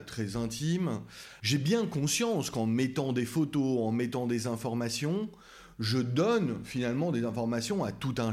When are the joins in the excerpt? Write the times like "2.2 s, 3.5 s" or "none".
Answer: 1.4 s